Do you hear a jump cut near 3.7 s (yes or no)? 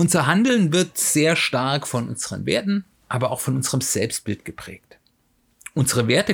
no